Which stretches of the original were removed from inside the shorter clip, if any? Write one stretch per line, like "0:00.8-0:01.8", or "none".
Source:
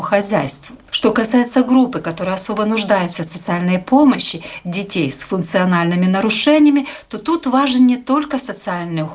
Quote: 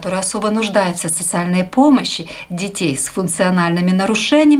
none